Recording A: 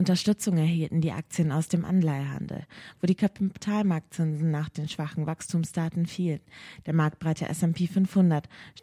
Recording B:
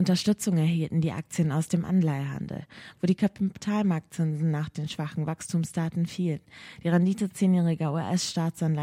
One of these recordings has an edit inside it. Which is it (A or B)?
A